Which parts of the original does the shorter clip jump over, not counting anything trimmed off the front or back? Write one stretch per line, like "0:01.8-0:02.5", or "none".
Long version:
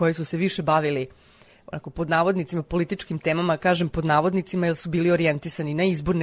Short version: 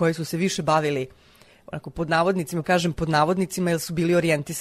0:02.6-0:03.6